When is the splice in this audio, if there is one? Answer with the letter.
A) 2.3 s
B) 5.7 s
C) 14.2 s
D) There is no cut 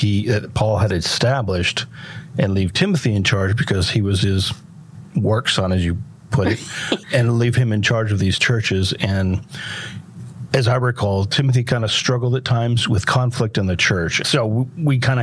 C